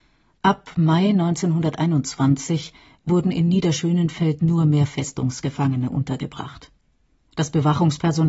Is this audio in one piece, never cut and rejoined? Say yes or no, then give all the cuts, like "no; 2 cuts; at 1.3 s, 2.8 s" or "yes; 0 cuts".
yes; 0 cuts